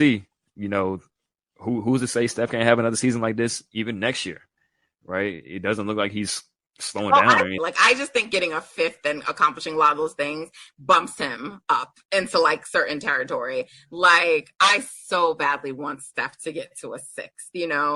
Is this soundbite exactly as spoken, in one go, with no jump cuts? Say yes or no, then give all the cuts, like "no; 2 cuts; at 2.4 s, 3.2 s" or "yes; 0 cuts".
no; 1 cut; at 7.6 s